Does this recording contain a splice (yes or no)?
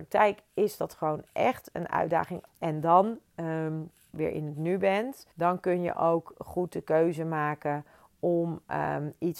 yes